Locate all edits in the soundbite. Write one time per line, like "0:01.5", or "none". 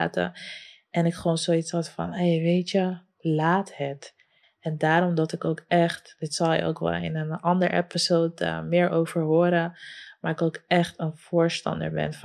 0:04.4